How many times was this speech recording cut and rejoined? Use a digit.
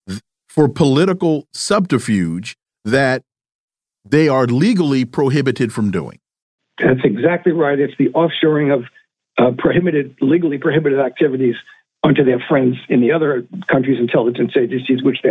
0